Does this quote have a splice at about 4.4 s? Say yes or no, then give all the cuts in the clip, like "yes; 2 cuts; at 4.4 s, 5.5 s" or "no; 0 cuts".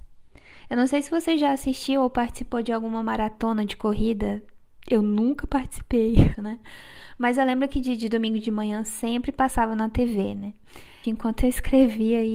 no; 2 cuts; at 6.3 s, 11.0 s